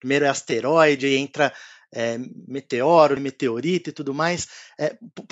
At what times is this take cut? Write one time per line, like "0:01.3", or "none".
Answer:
0:03.2